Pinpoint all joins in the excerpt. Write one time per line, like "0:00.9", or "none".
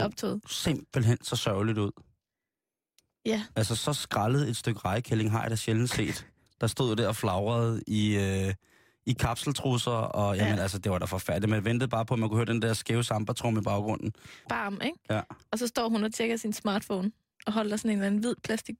0:14.4